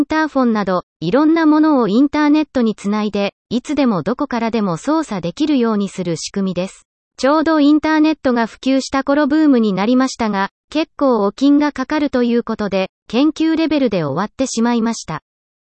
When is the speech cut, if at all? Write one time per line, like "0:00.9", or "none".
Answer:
0:07.1